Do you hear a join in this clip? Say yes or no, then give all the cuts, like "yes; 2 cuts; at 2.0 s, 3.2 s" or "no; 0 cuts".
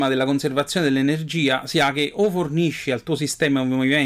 no; 0 cuts